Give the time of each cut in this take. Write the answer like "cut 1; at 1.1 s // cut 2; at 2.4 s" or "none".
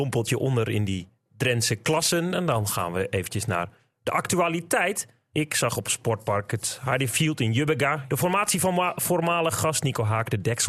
cut 1; at 5.3 s // cut 2; at 8.1 s

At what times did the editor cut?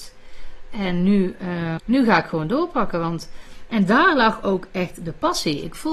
cut 1; at 1.8 s

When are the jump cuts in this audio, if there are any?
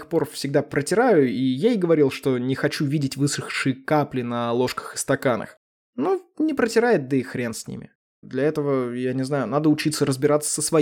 cut 1; at 8.2 s

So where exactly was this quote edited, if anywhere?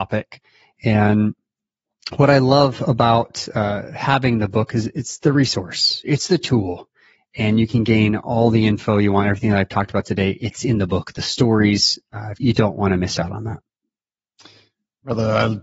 cut 1; at 12.4 s

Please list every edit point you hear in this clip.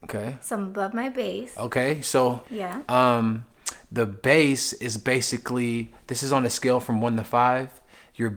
cut 1; at 2.4 s

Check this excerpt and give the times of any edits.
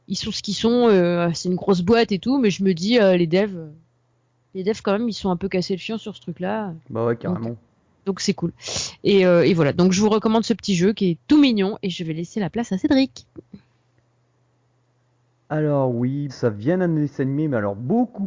cut 1; at 16.3 s

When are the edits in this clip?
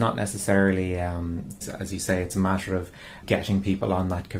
cut 1; at 1.6 s // cut 2; at 3.2 s

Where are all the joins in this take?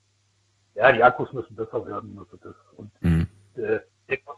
none

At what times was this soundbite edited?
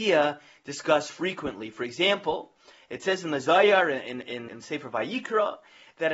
cut 1; at 4.5 s

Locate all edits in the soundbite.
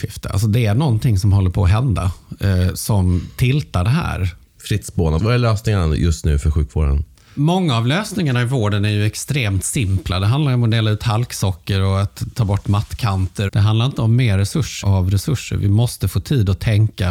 cut 1; at 5.2 s // cut 2; at 13.5 s // cut 3; at 14.8 s

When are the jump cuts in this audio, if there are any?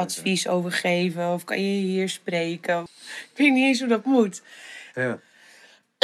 cut 1; at 2.9 s // cut 2; at 4.9 s

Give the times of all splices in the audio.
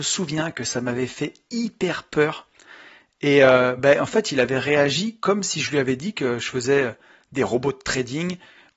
none

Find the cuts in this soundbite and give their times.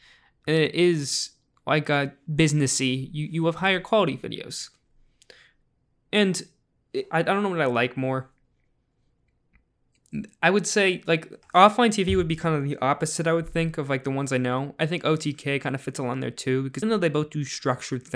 cut 1; at 7.1 s // cut 2; at 16.8 s

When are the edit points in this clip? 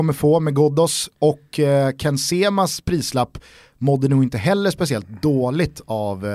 none

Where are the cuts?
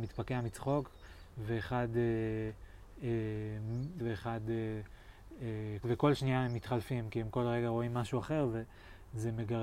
cut 1; at 4.0 s // cut 2; at 5.8 s

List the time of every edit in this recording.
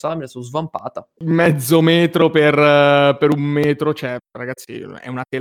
cut 1; at 1.2 s

